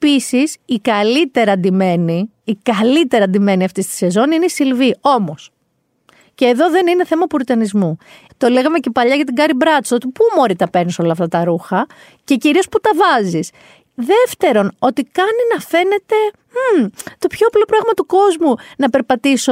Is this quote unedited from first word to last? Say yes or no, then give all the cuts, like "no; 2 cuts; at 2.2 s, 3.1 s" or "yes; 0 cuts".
no; 1 cut; at 8.3 s